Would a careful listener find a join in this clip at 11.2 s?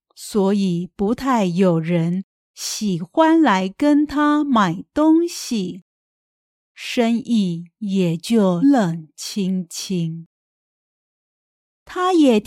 no; 1 cut; at 8.6 s

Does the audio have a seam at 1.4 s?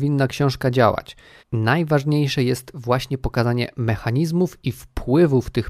yes; 1 cut; at 1.4 s

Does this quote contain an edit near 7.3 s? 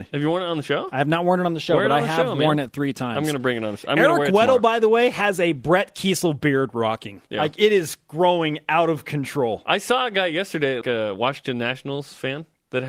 yes; 2 cuts; at 7.3 s, 10.8 s

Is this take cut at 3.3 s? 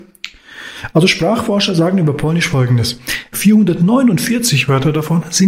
yes; 1 cut; at 3.3 s

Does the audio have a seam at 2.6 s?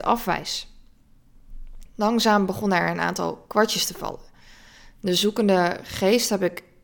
no; 0 cuts

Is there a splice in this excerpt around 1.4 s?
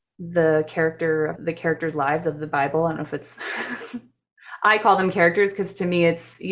yes; 1 cut; at 1.4 s

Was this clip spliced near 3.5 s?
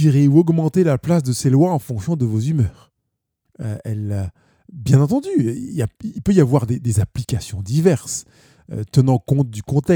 yes; 1 cut; at 3.5 s

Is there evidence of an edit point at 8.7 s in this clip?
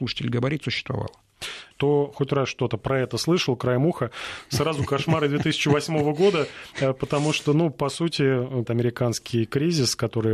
yes; 2 cuts; at 1.7 s, 8.7 s

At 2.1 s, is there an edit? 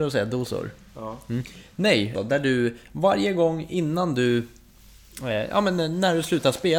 yes; 1 cut; at 2.1 s

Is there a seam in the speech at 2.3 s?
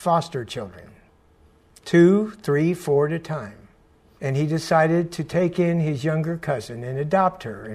no; 1 cut; at 4.2 s

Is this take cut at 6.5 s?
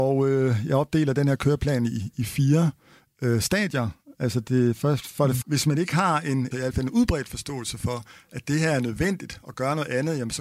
yes; 2 cuts; at 5.4 s, 6.5 s

